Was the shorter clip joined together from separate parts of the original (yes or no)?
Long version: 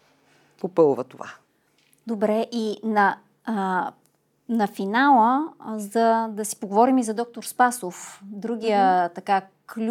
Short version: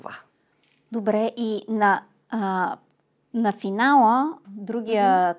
yes